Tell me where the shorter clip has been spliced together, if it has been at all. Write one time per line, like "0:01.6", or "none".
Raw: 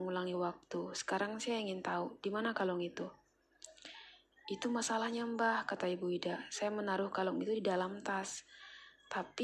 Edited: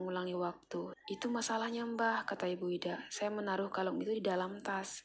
0:00.9